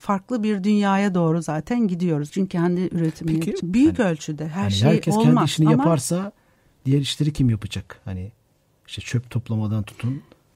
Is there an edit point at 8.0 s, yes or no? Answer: no